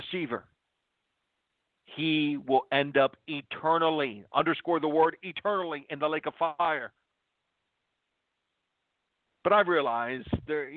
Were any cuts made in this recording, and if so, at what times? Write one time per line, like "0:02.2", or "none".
0:09.3

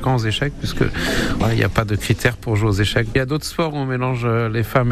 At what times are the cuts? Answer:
none

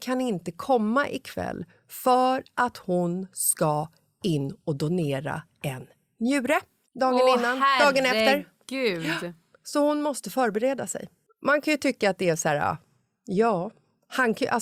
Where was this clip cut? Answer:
none

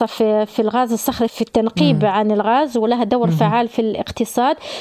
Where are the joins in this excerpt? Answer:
0:01.3

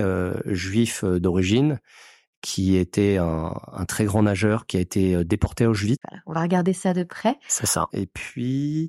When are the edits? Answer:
0:06.0
0:07.9

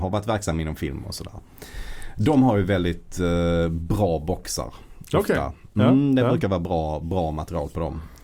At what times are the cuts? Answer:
none

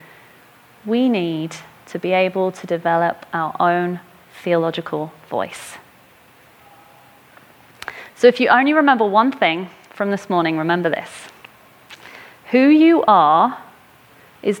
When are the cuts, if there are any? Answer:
none

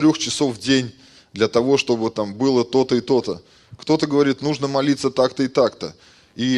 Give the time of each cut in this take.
none

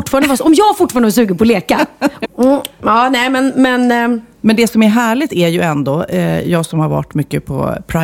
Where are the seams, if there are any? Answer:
0:02.2

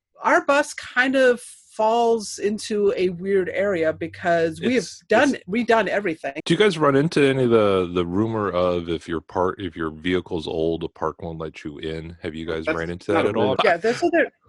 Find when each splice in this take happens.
0:06.4
0:13.6

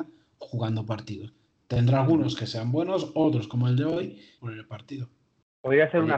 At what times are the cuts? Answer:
0:04.4

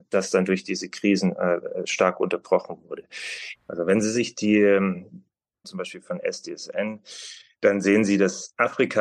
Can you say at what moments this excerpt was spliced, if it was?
0:03.5
0:05.6

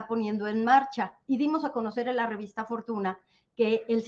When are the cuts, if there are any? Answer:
none

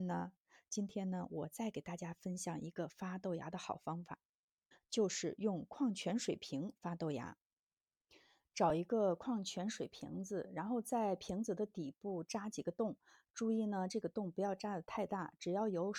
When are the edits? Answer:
none

